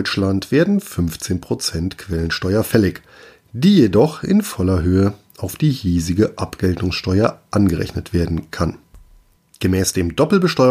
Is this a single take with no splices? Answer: no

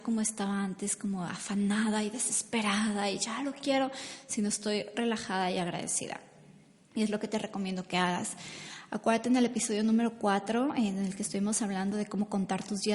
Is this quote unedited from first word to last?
yes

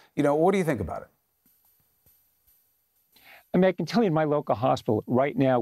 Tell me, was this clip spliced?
no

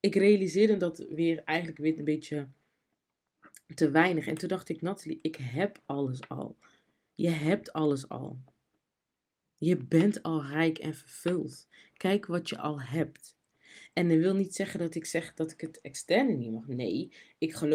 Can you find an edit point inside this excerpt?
no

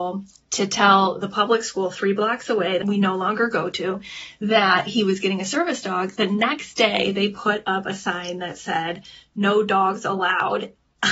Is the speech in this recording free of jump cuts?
yes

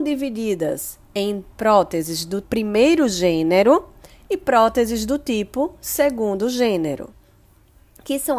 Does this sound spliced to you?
yes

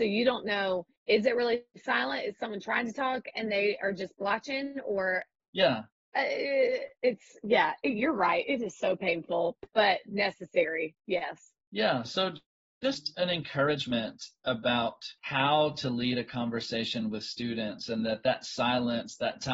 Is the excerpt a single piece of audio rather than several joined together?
no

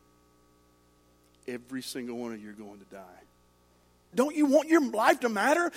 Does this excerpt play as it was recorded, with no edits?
no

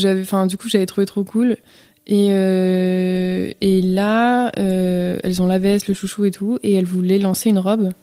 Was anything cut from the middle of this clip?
no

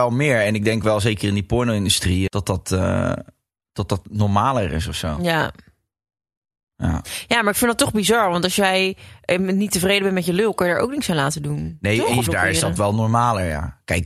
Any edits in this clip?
yes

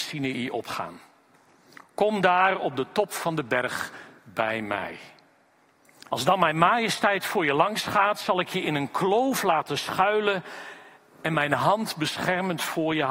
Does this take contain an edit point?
yes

